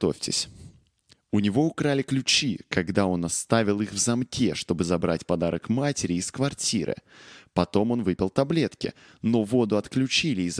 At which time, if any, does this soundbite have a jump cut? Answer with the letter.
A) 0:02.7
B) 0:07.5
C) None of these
C